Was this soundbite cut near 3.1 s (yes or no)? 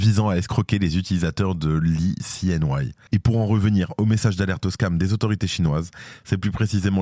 yes